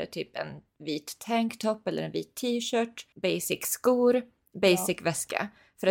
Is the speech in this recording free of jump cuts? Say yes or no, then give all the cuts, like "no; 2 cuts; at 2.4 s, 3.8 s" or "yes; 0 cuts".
no; 1 cut; at 3.1 s